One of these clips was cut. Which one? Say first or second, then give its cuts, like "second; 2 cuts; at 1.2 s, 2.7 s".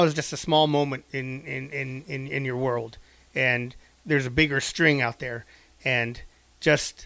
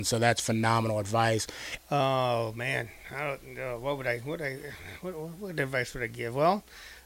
second; 1 cut; at 1.8 s